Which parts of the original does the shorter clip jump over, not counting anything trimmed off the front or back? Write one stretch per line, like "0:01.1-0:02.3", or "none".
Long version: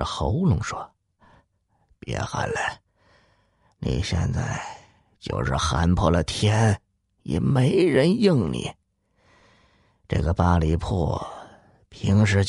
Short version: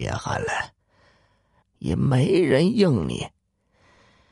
0:03.7-0:07.1